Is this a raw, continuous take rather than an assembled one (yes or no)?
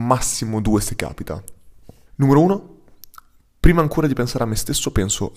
no